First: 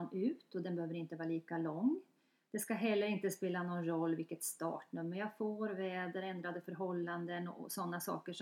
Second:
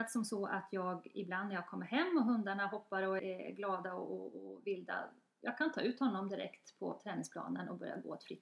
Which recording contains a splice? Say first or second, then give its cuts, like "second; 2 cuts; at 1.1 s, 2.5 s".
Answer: second; 1 cut; at 3.2 s